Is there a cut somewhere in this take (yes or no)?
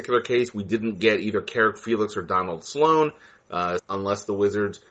yes